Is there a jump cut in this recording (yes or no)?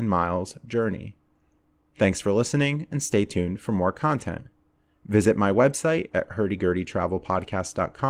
no